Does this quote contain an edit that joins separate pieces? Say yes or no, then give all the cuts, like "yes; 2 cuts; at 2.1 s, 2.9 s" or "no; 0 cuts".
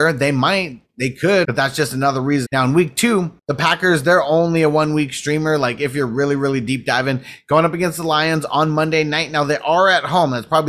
yes; 2 cuts; at 1.4 s, 2.5 s